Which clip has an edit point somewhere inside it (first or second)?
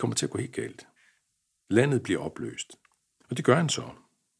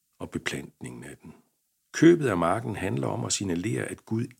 first